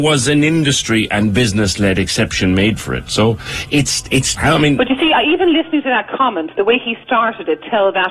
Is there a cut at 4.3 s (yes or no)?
yes